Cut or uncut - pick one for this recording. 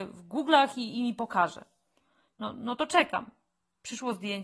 uncut